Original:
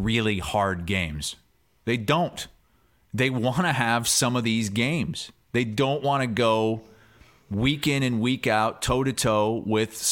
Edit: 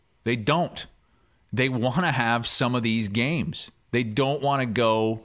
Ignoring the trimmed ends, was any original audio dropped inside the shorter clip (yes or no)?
no